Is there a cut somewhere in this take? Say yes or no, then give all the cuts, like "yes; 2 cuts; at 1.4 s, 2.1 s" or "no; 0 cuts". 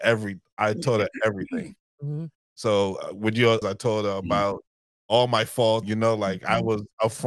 yes; 2 cuts; at 3.6 s, 5.8 s